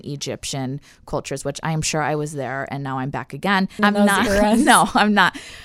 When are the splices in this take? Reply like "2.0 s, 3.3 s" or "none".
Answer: 3.8 s